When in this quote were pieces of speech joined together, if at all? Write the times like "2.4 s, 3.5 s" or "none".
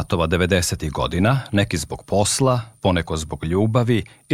none